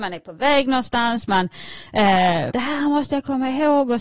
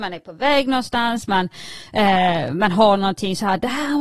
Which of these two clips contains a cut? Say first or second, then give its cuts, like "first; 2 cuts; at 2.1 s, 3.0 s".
first; 1 cut; at 2.5 s